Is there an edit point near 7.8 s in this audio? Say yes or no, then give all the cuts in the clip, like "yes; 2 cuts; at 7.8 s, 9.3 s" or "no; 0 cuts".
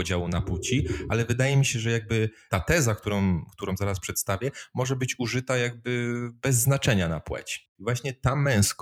yes; 1 cut; at 7.8 s